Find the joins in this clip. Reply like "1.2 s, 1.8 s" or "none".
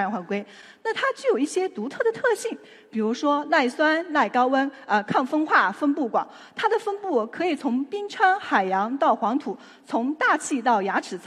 none